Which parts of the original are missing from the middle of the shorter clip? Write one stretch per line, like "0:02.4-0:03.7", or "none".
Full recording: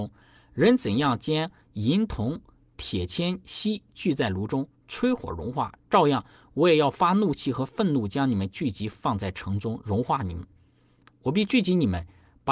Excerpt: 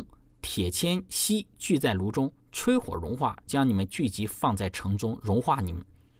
0:05.8-0:08.1